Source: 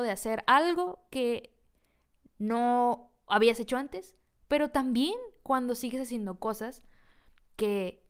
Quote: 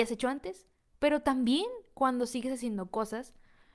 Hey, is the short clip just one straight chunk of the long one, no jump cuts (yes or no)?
yes